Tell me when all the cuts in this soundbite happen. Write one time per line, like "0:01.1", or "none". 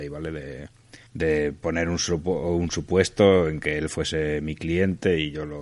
0:01.1